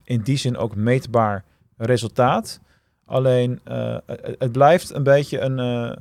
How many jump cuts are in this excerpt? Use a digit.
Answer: 0